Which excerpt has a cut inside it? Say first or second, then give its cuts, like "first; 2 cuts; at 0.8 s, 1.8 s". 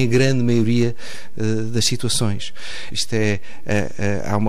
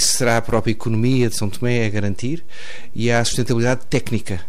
first; 1 cut; at 2.9 s